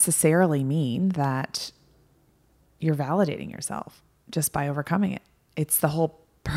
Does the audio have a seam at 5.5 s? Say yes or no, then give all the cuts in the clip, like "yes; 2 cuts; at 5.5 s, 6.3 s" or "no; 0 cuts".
no; 0 cuts